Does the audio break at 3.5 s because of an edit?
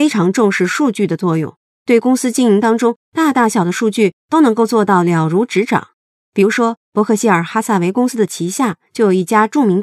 yes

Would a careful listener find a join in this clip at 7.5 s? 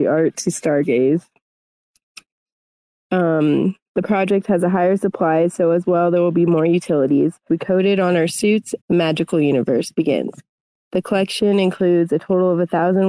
yes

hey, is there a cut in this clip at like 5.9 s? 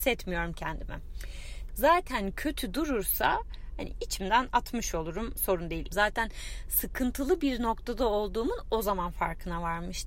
yes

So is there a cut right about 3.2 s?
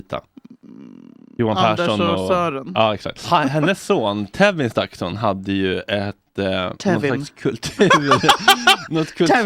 yes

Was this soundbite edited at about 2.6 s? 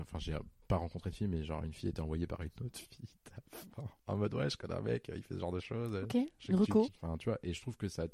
no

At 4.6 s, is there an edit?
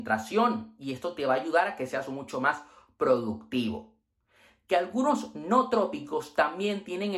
yes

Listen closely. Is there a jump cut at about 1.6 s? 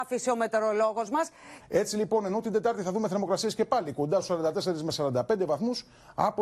yes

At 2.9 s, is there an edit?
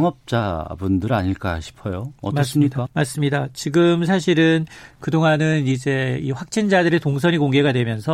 yes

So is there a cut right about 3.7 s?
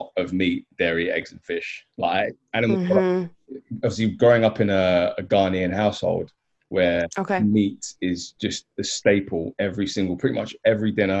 no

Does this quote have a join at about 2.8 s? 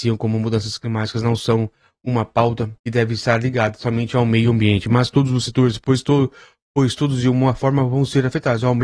yes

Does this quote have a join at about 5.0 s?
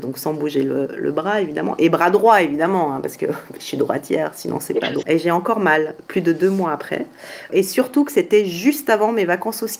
yes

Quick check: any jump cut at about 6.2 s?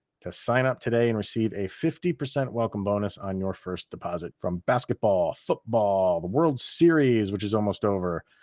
no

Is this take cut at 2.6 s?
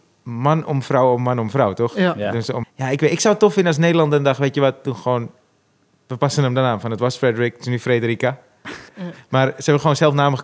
yes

